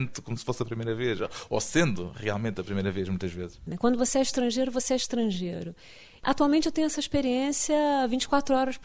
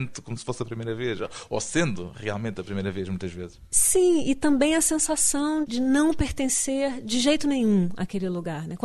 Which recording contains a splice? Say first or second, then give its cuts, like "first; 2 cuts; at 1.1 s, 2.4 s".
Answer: first; 1 cut; at 3.7 s